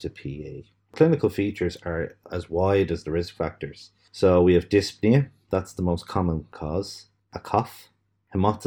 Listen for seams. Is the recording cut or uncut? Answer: cut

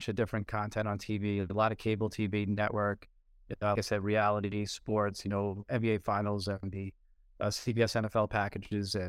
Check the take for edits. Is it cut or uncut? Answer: cut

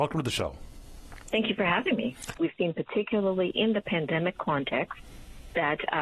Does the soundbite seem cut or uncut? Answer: cut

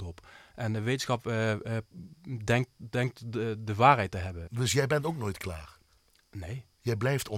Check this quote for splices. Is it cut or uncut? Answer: cut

